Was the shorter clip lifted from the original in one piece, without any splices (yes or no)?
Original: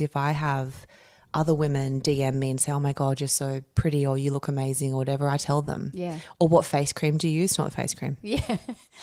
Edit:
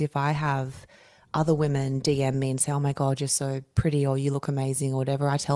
yes